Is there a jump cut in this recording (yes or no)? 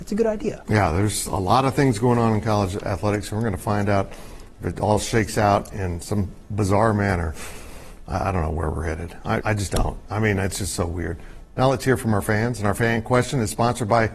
yes